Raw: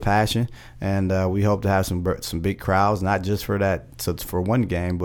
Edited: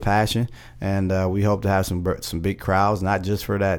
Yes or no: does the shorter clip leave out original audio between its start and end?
no